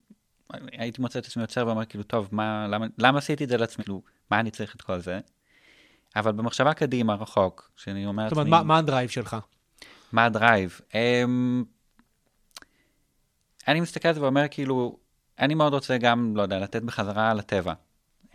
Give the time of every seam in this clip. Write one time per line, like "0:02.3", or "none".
0:03.8